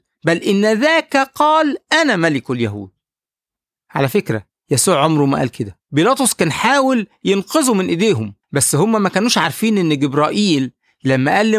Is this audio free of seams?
no; 2 cuts; at 5.8 s, 8.4 s

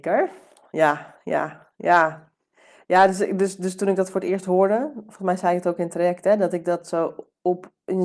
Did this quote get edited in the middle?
no; 0 cuts

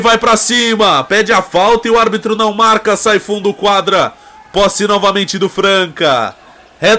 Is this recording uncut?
yes; 0 cuts

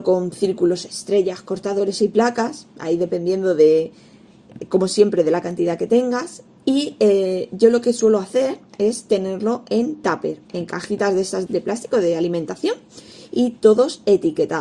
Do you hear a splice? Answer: yes; 2 cuts; at 6.6 s, 11.5 s

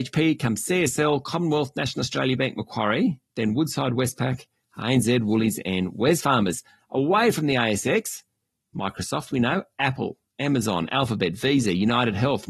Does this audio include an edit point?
no; 0 cuts

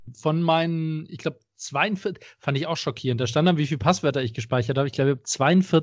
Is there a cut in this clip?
no; 0 cuts

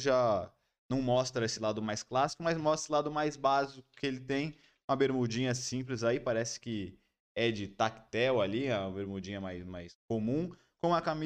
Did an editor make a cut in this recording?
no; 0 cuts

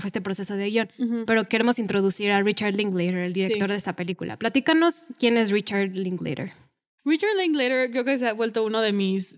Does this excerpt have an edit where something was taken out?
no; 0 cuts

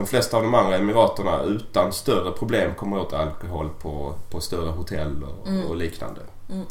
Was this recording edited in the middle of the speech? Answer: no; 0 cuts

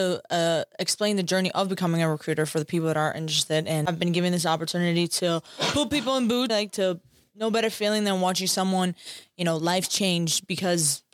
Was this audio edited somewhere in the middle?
yes; 1 cut; at 6.5 s

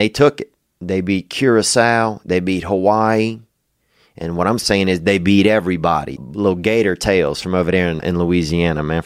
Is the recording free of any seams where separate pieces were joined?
no; 2 cuts; at 6.2 s, 8.0 s

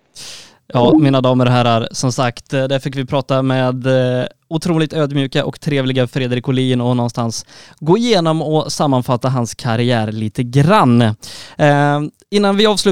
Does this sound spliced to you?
no; 0 cuts

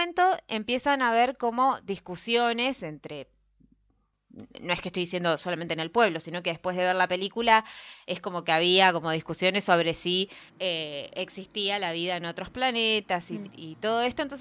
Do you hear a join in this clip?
yes; 2 cuts; at 10.5 s, 13.5 s

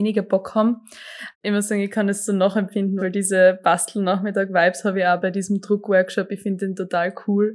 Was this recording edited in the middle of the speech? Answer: yes; 2 cuts; at 1.3 s, 3.0 s

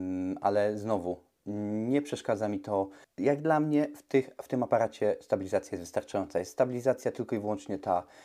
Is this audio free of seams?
no; 1 cut; at 3.1 s

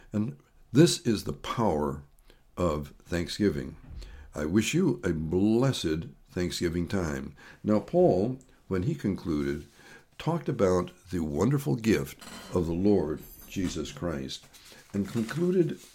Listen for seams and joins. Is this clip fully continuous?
yes; 0 cuts

